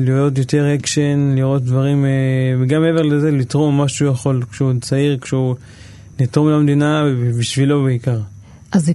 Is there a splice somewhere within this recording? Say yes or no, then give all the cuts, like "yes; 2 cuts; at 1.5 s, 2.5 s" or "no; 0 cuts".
no; 0 cuts